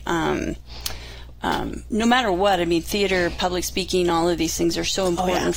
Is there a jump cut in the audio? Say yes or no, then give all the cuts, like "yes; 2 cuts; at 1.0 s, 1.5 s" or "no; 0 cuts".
no; 0 cuts